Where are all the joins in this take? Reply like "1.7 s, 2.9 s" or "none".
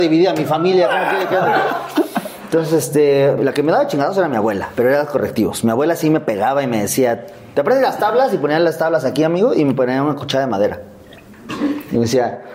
3.4 s